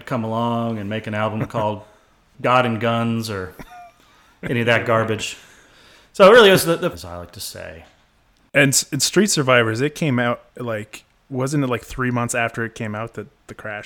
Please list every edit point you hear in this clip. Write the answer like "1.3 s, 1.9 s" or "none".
6.9 s, 10.5 s